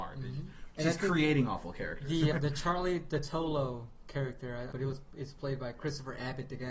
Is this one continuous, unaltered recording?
no; 2 cuts; at 2.3 s, 4.7 s

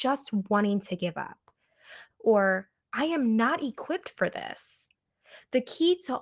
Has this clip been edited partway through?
yes; 1 cut; at 2.1 s

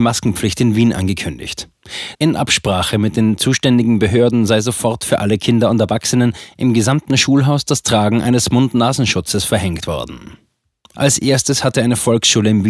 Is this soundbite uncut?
no; 2 cuts; at 2.1 s, 10.9 s

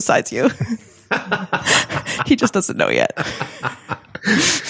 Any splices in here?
no; 0 cuts

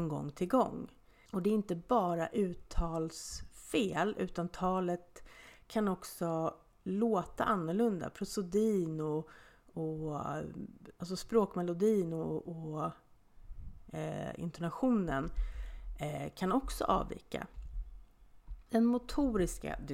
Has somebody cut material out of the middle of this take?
no; 0 cuts

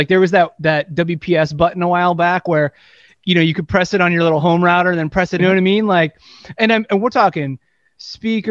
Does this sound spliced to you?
yes; 1 cut; at 5.4 s

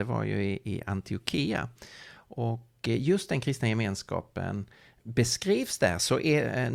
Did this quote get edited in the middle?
no; 0 cuts

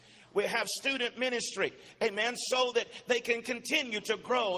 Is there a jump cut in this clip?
no; 0 cuts

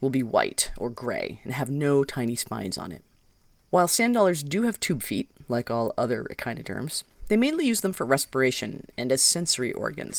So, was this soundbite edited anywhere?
no; 0 cuts

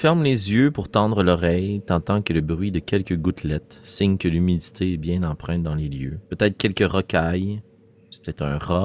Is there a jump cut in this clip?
yes; 1 cut; at 6.3 s

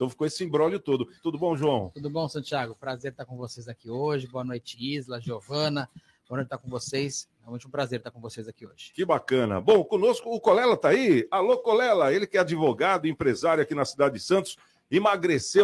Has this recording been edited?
yes; 1 cut; at 1.2 s

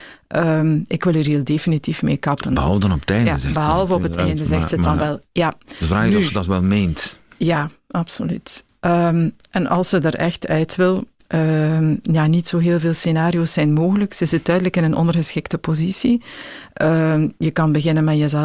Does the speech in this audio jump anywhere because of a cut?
no; 0 cuts

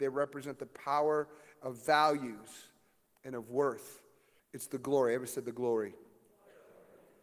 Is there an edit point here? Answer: yes; 1 cut; at 4.4 s

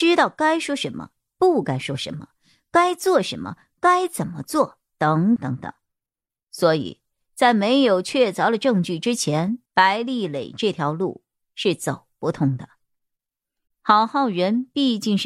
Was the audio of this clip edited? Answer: yes; 3 cuts; at 5.4 s, 9.7 s, 13.7 s

